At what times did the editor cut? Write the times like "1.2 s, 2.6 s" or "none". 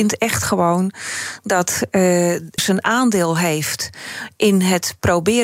2.6 s